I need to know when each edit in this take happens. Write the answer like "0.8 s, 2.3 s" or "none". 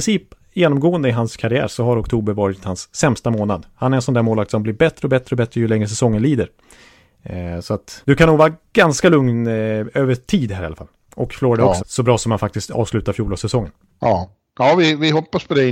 11.8 s